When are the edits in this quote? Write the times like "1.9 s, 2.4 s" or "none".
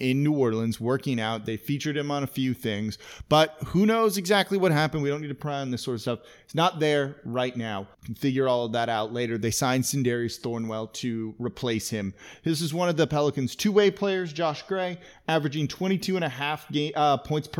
7.9 s